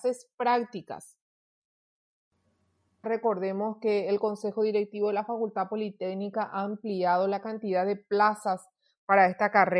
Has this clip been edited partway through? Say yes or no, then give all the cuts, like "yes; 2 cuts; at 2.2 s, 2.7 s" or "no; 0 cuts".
yes; 1 cut; at 3.0 s